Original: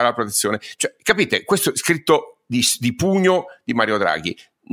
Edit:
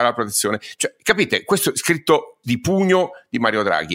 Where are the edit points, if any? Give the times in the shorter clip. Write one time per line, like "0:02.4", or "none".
0:02.4